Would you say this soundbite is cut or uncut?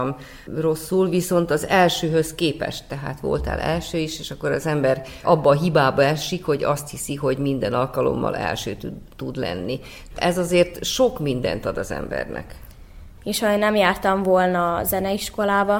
cut